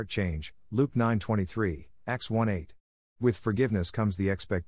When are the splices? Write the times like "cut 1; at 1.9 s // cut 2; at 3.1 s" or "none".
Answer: cut 1; at 3.0 s

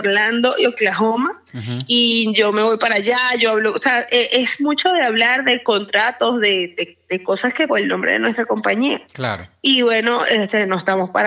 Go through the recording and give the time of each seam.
cut 1; at 7.7 s

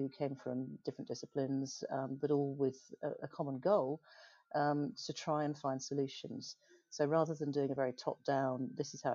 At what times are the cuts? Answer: none

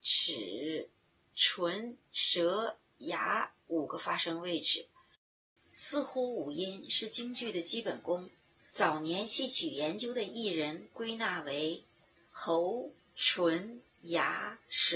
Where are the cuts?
cut 1; at 5.6 s

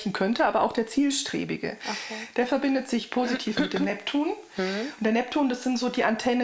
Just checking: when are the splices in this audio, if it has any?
none

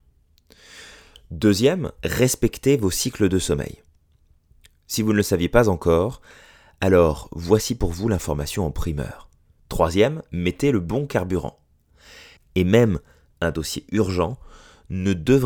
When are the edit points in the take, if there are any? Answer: cut 1; at 9.6 s // cut 2; at 12.4 s

